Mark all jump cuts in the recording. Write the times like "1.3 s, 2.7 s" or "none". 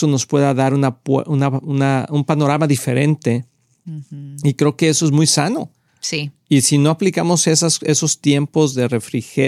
none